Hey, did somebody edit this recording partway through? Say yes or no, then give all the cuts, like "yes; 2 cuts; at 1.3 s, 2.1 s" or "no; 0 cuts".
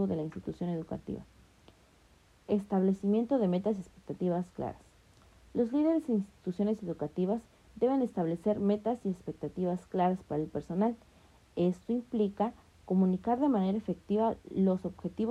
no; 0 cuts